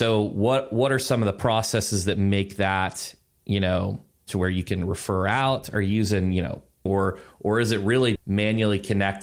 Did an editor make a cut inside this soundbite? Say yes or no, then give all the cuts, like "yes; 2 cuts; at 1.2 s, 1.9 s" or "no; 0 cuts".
yes; 2 cuts; at 6.9 s, 8.2 s